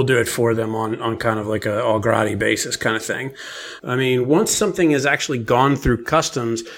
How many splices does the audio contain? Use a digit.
1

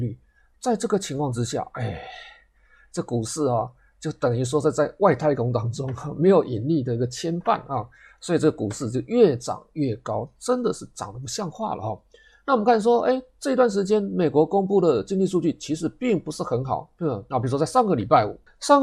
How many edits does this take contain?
1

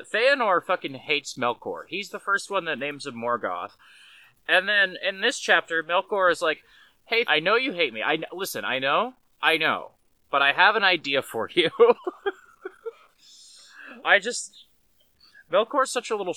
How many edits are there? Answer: 2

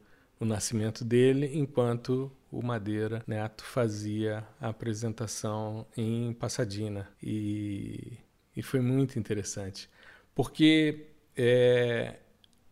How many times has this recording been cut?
1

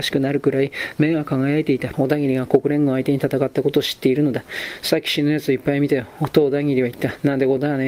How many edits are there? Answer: 1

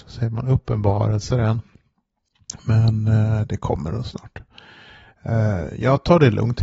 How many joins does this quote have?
0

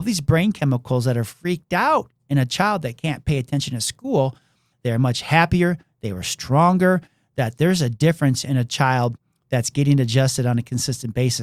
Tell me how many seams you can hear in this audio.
1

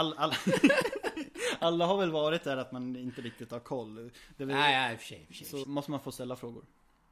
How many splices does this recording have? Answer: 1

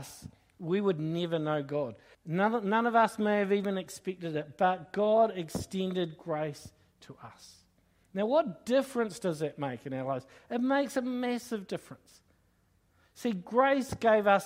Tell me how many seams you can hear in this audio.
1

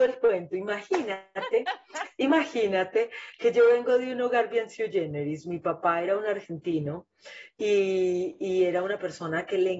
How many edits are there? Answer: 0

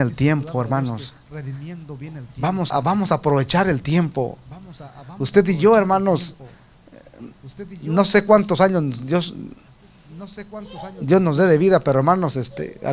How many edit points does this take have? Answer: 1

